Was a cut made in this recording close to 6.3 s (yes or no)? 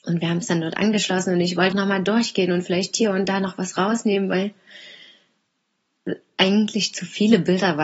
no